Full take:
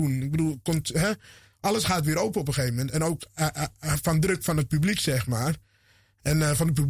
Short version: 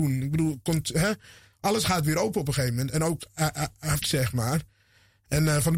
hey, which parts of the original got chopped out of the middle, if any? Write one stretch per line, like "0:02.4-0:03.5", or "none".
0:04.0-0:05.0